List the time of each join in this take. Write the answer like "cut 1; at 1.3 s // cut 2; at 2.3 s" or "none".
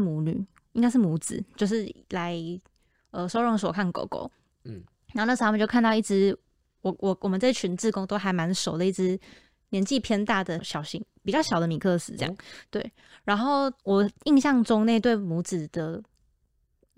cut 1; at 10.6 s // cut 2; at 13.8 s